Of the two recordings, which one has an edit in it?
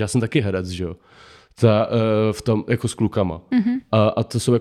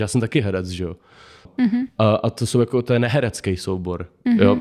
second; 1 cut; at 1.5 s

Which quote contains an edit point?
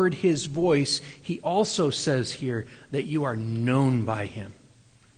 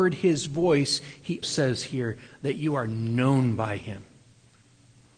second; 1 cut; at 1.4 s

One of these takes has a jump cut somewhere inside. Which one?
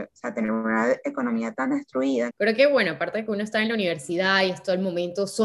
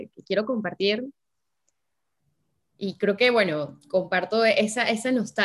first; 1 cut; at 2.3 s

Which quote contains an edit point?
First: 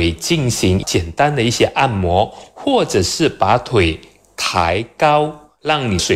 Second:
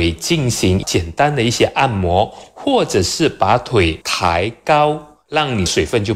second; 1 cut; at 4.0 s

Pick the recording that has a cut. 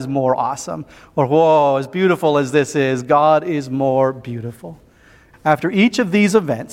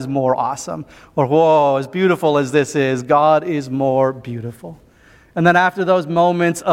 first; 1 cut; at 5.3 s

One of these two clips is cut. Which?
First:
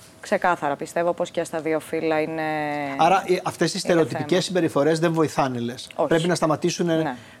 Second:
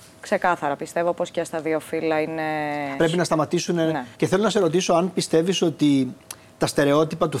second; 2 cuts; at 3.0 s, 4.1 s

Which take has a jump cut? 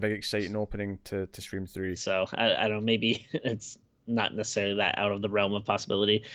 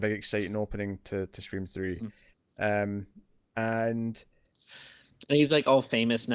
first; 1 cut; at 2.0 s

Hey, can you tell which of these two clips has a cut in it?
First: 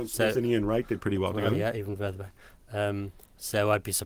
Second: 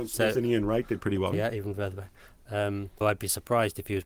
second; 2 cuts; at 1.3 s, 3.0 s

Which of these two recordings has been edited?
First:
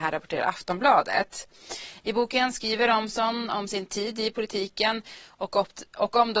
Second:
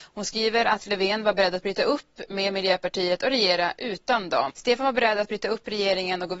second; 1 cut; at 4.5 s

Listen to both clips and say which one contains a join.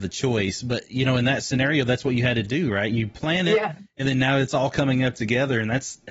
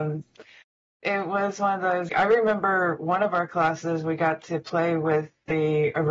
second; 2 cuts; at 1.0 s, 2.1 s

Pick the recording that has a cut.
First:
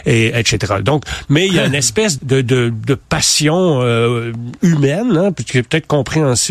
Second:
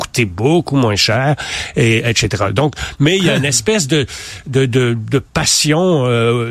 first; 1 cut; at 2.2 s

